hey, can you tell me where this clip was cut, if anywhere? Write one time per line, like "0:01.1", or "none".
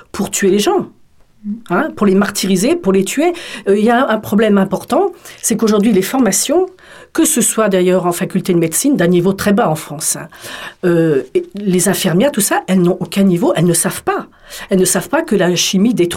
none

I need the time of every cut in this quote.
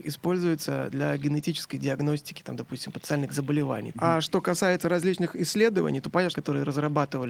0:03.9
0:06.3

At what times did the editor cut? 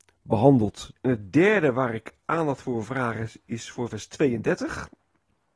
0:00.9

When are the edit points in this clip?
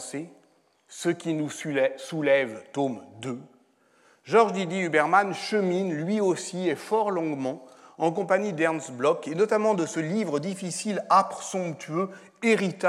none

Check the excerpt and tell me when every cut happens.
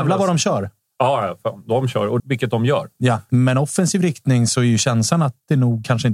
0:02.2
0:03.3

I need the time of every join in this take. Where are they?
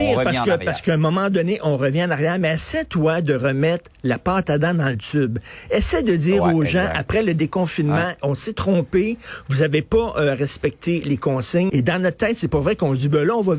0:11.7

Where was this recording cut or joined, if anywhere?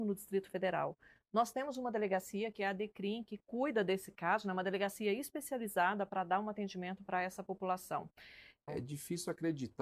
0:08.7

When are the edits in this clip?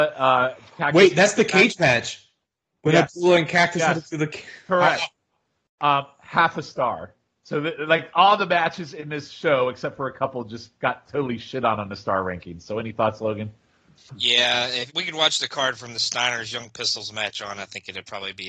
0:14.9

